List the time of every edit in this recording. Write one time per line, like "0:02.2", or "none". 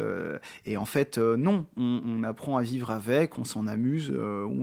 0:02.0